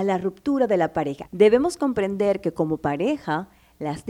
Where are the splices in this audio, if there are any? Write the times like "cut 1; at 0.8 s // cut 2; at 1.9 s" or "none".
cut 1; at 1.3 s